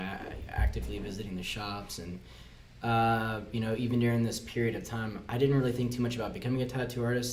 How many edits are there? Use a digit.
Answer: 0